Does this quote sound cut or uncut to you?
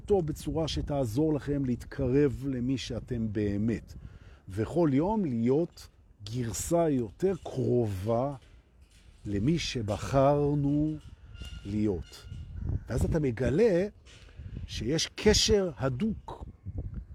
uncut